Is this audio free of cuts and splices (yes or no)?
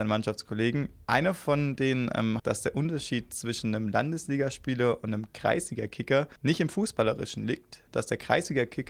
no